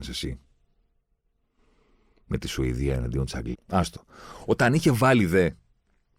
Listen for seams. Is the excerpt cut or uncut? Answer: cut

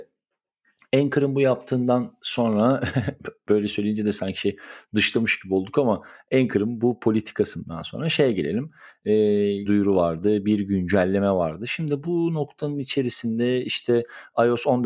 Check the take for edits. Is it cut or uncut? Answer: cut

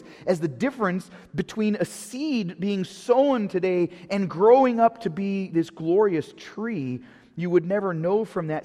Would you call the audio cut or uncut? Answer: uncut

